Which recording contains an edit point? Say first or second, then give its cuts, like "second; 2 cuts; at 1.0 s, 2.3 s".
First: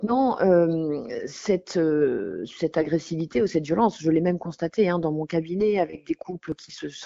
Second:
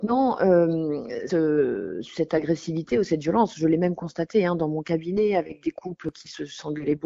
second; 1 cut; at 1.3 s